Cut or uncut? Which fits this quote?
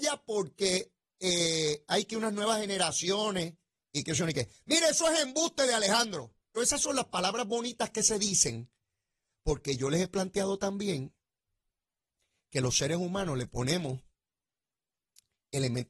cut